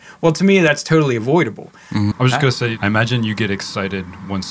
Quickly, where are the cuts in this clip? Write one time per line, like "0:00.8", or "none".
0:02.1